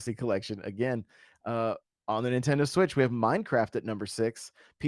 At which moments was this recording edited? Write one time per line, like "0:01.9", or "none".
none